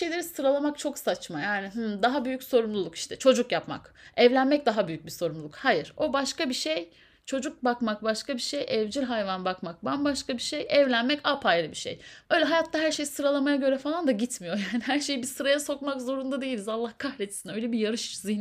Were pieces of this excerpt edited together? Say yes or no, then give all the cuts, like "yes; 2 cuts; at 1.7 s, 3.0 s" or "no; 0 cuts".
yes; 1 cut; at 12.3 s